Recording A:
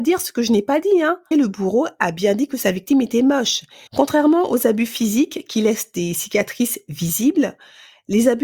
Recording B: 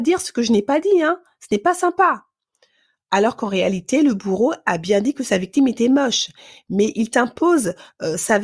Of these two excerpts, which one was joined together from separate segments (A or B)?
A